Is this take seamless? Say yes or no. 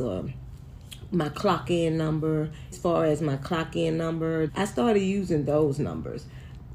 no